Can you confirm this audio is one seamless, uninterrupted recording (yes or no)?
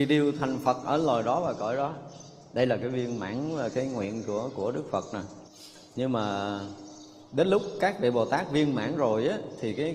no